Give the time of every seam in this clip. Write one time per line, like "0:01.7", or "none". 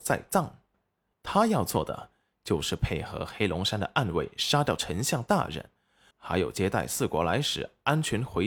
0:01.1
0:06.1